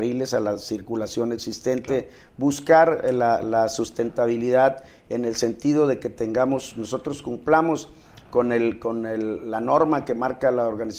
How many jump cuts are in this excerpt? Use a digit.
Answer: 0